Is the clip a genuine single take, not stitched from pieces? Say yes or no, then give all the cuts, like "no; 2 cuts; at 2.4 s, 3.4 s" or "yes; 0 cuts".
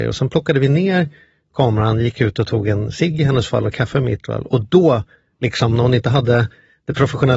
yes; 0 cuts